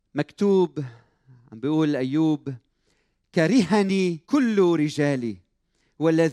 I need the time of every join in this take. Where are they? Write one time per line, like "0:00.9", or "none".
0:04.2